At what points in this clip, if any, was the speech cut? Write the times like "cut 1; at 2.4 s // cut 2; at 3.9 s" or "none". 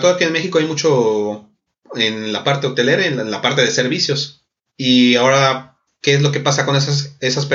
none